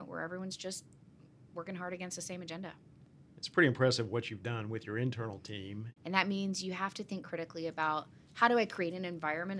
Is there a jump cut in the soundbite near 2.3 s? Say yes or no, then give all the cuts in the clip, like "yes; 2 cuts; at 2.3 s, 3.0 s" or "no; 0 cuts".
no; 1 cut; at 6.0 s